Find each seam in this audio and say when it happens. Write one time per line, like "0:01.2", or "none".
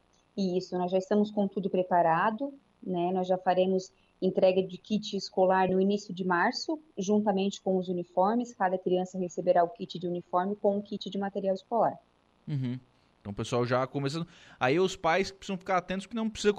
0:05.7